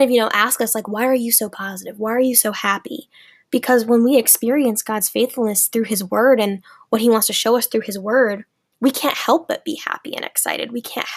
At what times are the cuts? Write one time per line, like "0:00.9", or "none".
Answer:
none